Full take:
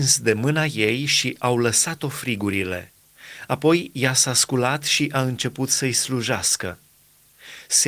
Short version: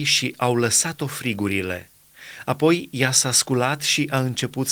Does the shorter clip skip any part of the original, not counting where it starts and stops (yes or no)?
no